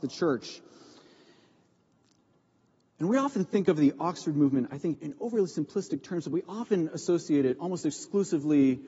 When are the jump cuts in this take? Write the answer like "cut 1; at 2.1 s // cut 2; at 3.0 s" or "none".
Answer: cut 1; at 4.9 s